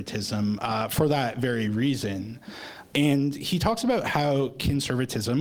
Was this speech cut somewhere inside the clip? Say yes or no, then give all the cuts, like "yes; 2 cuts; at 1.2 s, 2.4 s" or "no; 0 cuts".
yes; 1 cut; at 2.9 s